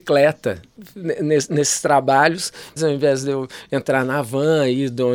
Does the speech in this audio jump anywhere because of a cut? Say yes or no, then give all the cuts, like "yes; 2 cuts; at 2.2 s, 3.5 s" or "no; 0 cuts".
yes; 1 cut; at 2.8 s